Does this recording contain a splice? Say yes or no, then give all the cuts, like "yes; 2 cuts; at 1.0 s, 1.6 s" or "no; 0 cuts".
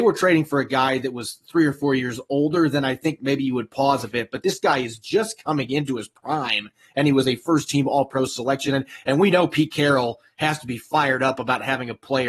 no; 0 cuts